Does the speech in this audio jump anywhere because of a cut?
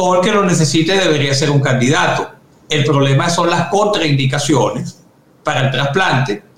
no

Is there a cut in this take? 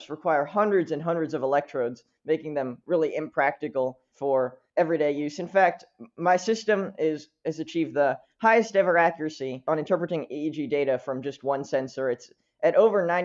no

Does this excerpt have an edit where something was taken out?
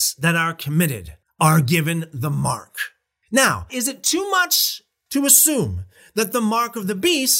yes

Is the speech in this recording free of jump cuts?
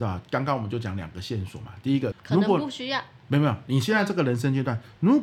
no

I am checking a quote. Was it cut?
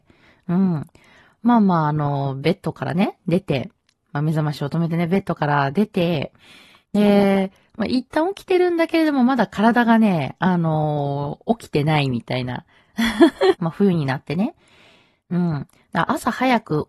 yes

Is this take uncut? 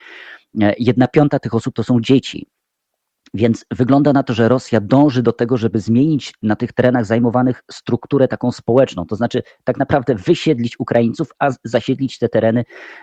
yes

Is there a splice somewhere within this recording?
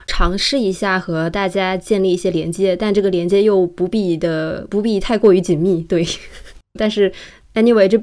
yes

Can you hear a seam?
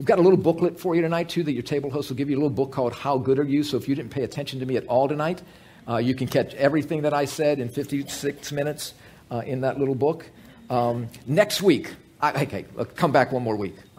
yes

